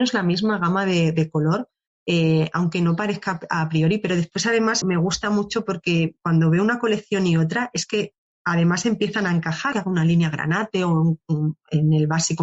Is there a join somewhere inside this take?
yes; 2 cuts; at 4.8 s, 9.7 s

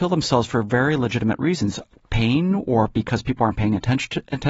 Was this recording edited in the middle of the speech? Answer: no; 0 cuts

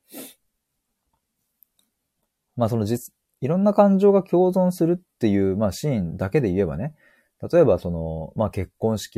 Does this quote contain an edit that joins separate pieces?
no; 0 cuts

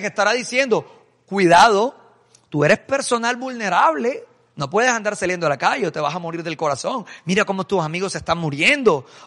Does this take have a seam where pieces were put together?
no; 0 cuts

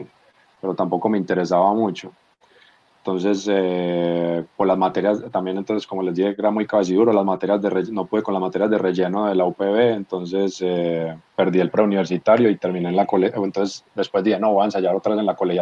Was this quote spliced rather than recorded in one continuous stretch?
yes; 1 cut; at 11.3 s

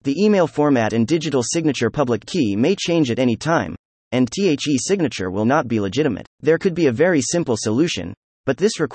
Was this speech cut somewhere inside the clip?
yes; 2 cuts; at 4.0 s, 6.3 s

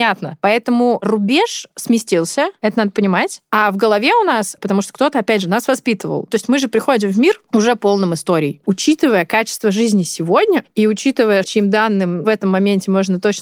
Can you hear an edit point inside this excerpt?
yes; 3 cuts; at 4.6 s, 8.6 s, 11.4 s

